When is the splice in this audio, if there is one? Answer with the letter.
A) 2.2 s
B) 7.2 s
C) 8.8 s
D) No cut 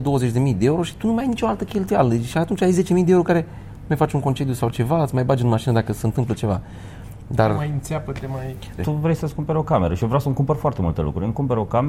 C